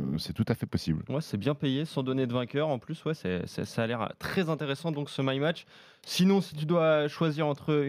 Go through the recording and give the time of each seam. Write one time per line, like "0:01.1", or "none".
none